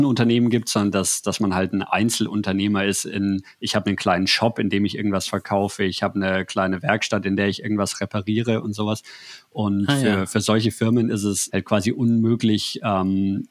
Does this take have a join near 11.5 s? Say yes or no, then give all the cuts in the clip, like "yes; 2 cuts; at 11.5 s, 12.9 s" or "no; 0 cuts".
yes; 1 cut; at 11.5 s